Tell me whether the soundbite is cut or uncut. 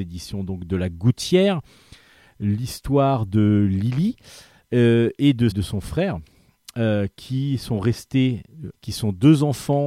cut